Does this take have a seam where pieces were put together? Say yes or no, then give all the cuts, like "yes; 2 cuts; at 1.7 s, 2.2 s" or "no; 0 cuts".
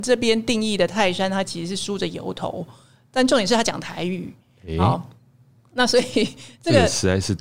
no; 0 cuts